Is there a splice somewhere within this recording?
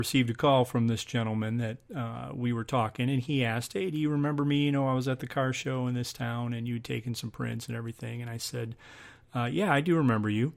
no; 0 cuts

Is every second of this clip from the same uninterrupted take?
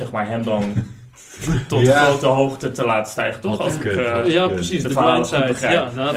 yes; 0 cuts

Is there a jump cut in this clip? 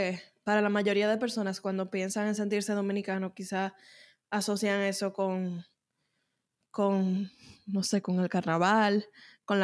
no; 0 cuts

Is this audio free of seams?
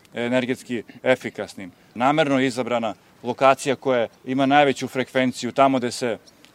no; 2 cuts; at 2.0 s, 4.2 s

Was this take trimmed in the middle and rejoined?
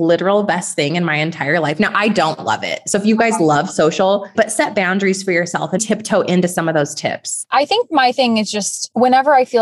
yes; 2 cuts; at 4.3 s, 5.8 s

